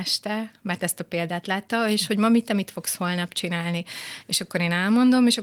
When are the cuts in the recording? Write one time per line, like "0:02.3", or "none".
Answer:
none